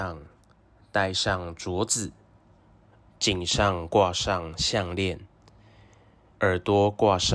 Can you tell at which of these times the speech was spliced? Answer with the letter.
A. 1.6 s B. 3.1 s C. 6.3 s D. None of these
C